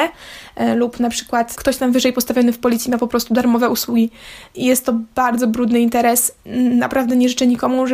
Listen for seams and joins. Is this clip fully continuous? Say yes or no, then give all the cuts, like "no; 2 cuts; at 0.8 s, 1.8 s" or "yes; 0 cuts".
no; 1 cut; at 1.5 s